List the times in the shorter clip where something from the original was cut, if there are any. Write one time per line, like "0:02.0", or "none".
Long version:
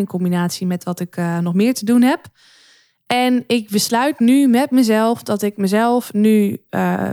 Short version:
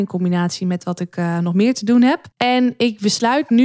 0:02.3